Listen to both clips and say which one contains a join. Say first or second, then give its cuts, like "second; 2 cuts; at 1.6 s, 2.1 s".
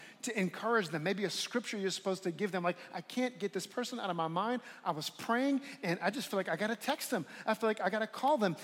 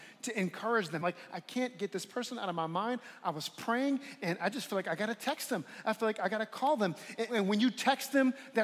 second; 2 cuts; at 1.0 s, 7.3 s